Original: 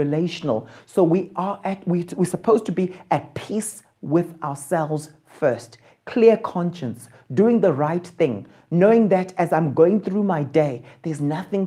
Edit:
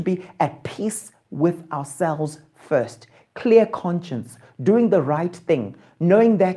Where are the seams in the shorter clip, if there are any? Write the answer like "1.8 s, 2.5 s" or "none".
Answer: none